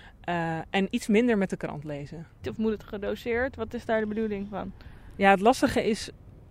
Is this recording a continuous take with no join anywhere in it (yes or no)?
no